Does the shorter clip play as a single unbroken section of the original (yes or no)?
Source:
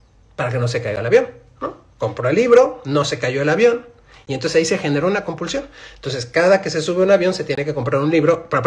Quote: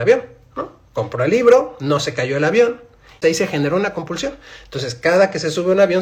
no